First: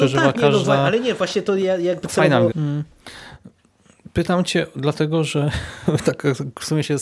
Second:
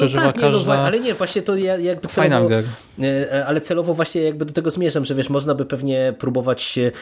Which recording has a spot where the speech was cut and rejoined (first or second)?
first